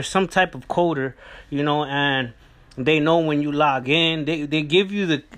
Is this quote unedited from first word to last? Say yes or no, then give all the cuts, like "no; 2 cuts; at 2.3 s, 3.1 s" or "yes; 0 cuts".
yes; 0 cuts